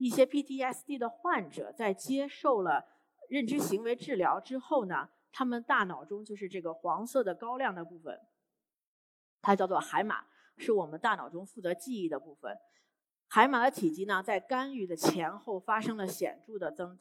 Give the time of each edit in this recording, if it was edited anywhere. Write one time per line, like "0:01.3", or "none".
none